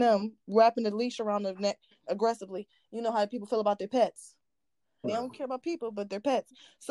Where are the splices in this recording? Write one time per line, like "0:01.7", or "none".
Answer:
0:05.0

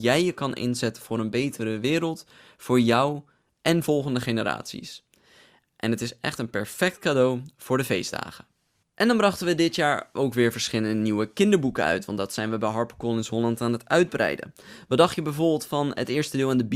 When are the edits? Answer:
0:08.8

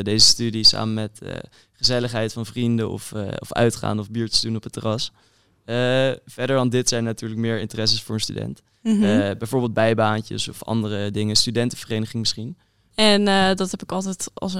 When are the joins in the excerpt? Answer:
0:12.9

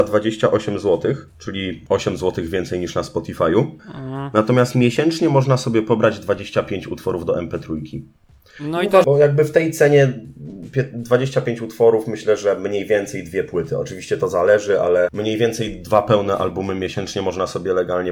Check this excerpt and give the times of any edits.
0:03.8
0:09.0

